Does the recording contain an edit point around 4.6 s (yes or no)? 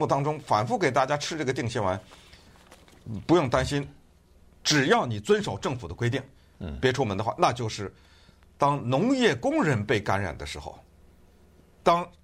yes